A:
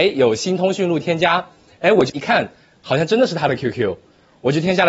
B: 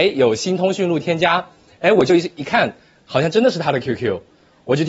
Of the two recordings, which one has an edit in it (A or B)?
A